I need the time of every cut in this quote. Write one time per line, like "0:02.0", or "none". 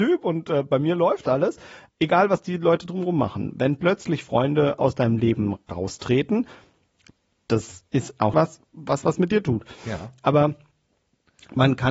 0:08.3

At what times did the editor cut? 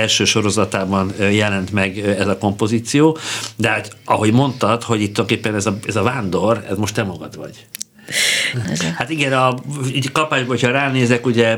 0:08.6

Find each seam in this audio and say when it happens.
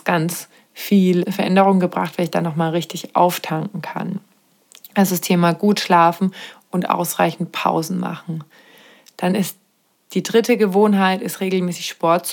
none

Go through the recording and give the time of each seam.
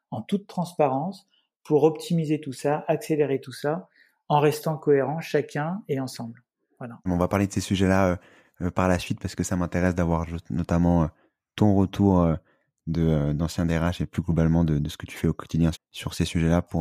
0:07.1
0:15.7

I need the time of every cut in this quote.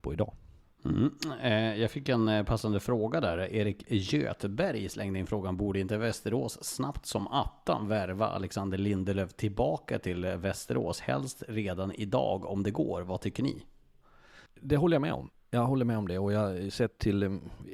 0:14.5

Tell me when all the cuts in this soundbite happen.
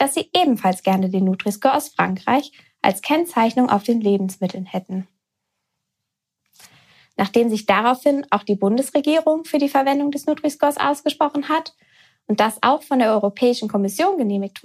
none

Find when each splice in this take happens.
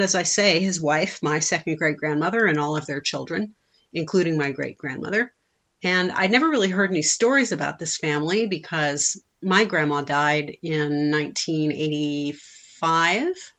none

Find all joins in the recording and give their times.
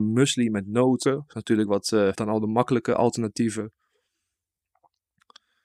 0:01.0
0:02.1

